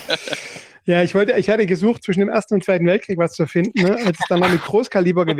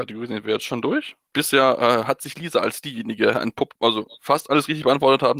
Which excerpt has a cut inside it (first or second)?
second